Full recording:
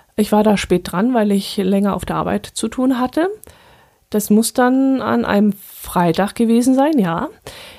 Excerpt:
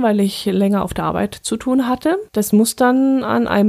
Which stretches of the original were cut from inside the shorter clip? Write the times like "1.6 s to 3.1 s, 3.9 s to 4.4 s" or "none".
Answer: 3.4 s to 4.1 s